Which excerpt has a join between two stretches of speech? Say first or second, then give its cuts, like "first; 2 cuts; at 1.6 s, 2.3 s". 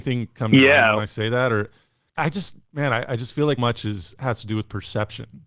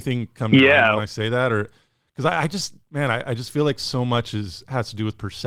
first; 2 cuts; at 2.2 s, 3.6 s